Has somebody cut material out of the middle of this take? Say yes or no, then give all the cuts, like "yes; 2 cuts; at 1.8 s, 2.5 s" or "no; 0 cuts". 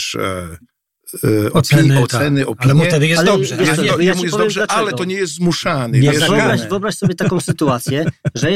no; 0 cuts